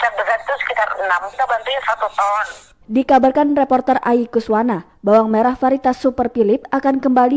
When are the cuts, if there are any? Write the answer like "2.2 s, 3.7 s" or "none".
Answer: 1.8 s